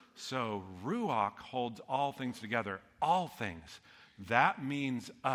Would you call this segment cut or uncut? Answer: uncut